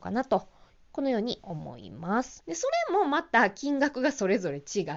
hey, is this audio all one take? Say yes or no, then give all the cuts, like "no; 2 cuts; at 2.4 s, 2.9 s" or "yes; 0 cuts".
no; 1 cut; at 2.4 s